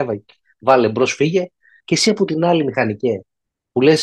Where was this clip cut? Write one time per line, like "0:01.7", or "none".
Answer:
0:01.8